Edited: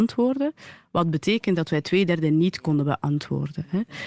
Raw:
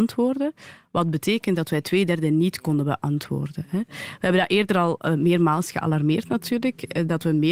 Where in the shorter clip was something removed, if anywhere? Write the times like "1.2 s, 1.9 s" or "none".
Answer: none